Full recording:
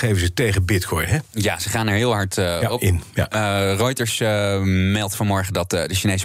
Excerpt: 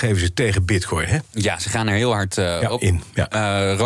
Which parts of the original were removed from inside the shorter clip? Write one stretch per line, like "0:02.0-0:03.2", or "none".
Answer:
none